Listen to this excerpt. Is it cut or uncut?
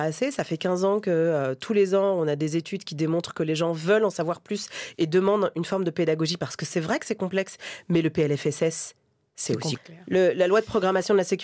cut